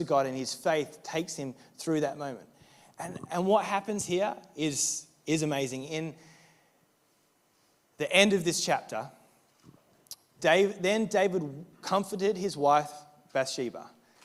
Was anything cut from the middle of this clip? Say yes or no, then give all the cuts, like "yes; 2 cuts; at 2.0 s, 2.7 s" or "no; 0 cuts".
yes; 2 cuts; at 10.4 s, 11.7 s